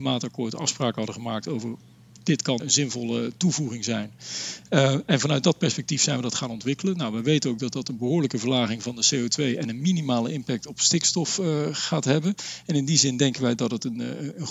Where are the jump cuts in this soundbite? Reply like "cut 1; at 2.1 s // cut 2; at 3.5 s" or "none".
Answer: cut 1; at 2.6 s